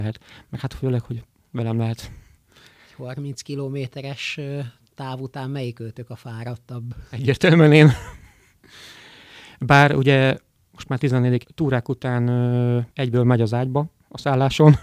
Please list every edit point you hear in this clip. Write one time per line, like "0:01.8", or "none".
0:11.4
0:12.9